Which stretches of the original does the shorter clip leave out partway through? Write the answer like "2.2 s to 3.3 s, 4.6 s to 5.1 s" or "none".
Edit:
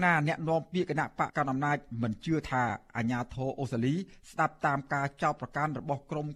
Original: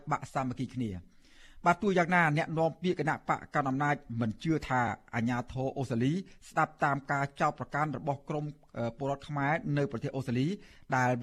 3.4 s to 3.5 s